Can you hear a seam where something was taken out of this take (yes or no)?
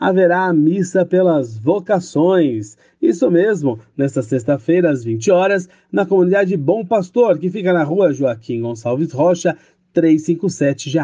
no